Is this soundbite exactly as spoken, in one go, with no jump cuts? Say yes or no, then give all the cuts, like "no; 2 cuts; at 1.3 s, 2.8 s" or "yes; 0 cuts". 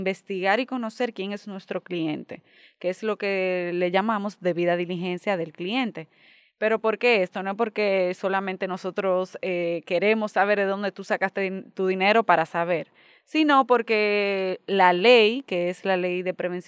yes; 0 cuts